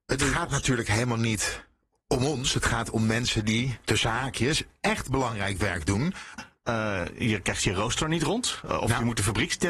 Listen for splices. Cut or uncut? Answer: cut